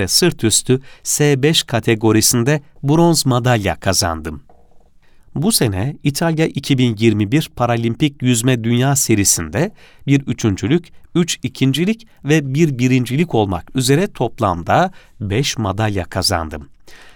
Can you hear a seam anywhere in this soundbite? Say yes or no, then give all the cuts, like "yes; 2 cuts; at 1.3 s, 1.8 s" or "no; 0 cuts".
yes; 1 cut; at 5.2 s